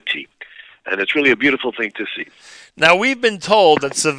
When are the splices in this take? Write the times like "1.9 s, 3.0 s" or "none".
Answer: none